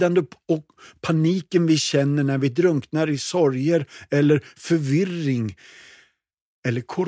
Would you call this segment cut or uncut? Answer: uncut